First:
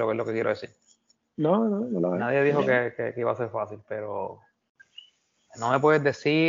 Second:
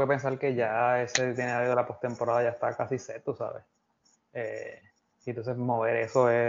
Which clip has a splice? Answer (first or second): first